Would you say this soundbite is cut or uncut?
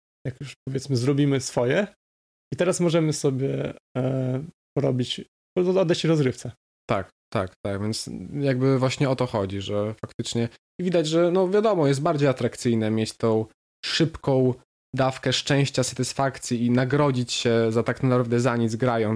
uncut